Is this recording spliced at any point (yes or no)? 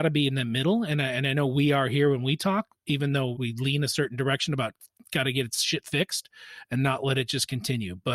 yes